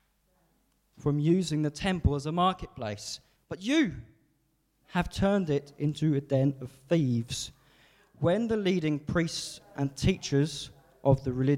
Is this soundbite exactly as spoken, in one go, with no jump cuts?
no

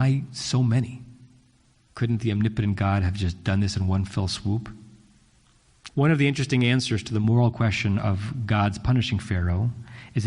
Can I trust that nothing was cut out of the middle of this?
no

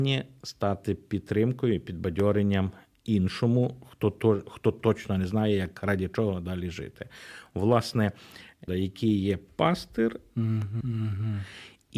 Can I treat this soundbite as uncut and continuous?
no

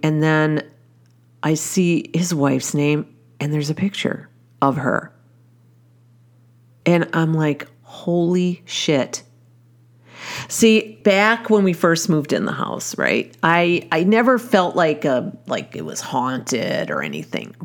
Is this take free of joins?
no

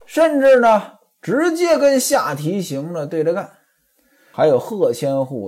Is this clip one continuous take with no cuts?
no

